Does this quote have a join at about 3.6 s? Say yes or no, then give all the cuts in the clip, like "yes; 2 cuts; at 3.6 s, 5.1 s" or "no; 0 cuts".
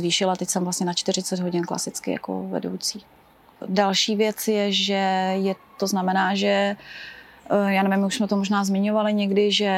yes; 2 cuts; at 3.6 s, 5.8 s